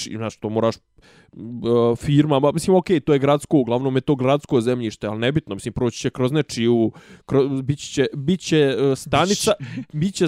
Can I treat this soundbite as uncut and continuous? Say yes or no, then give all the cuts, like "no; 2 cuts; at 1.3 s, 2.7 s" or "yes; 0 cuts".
yes; 0 cuts